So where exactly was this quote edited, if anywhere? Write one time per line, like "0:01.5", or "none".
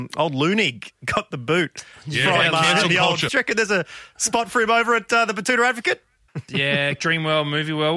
0:03.3
0:06.3